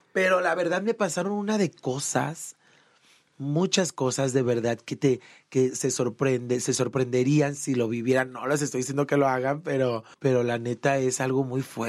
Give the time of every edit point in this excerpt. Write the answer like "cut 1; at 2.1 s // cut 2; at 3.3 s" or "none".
cut 1; at 10.1 s